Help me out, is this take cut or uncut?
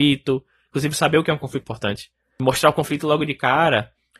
cut